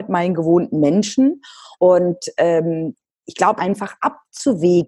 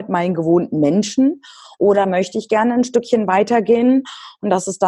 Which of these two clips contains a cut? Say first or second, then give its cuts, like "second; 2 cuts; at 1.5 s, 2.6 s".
first; 2 cuts; at 1.8 s, 3.6 s